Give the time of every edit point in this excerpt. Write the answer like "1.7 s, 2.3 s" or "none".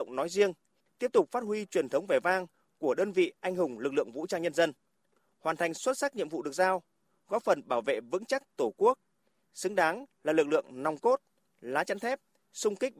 none